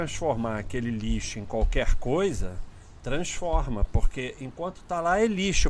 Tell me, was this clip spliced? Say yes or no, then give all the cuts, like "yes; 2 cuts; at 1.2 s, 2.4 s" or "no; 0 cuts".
no; 0 cuts